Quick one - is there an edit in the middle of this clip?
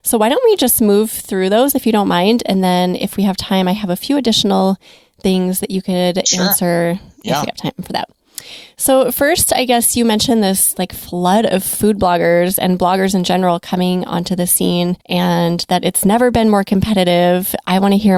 yes; 1 cut; at 15.0 s

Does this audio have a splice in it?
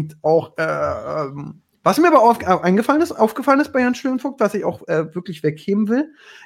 no; 0 cuts

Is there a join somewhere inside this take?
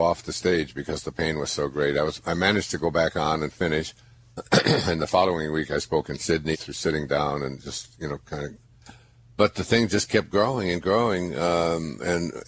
yes; 1 cut; at 6.5 s

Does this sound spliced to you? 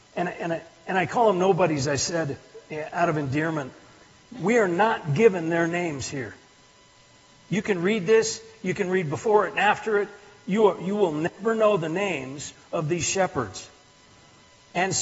no; 0 cuts

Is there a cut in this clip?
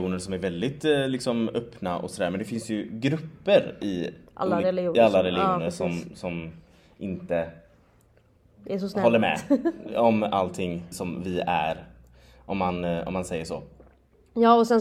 yes; 1 cut; at 10.9 s

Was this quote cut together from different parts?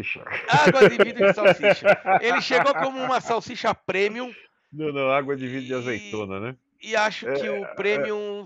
no; 0 cuts

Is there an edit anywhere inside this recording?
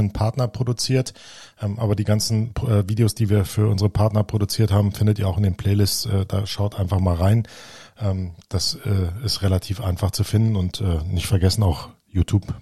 no; 0 cuts

